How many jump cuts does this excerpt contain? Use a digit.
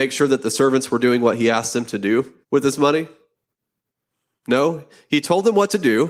1